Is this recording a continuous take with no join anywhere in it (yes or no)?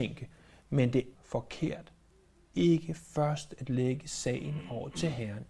no